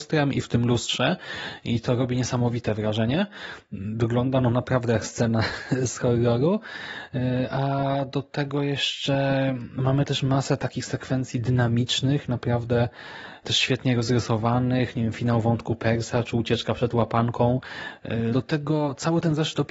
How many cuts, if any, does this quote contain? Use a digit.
1